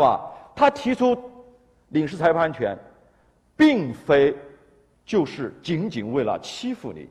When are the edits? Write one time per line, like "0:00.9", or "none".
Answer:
none